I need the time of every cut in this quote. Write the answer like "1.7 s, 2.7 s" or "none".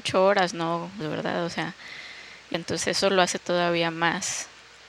1.0 s, 2.5 s